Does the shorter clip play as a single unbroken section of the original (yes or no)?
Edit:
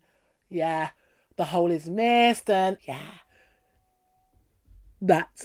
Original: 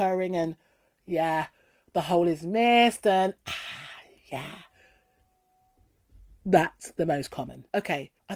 no